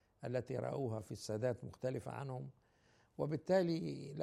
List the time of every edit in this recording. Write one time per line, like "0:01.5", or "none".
none